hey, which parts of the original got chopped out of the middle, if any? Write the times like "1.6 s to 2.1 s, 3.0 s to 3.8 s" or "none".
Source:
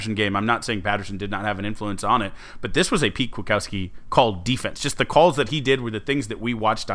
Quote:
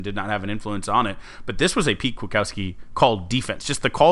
none